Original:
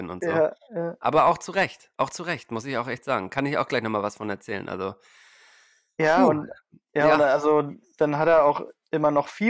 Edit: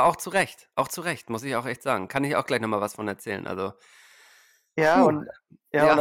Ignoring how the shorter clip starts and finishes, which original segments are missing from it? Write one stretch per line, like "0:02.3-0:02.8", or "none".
none